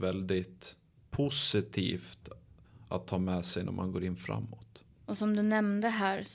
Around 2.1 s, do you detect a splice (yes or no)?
no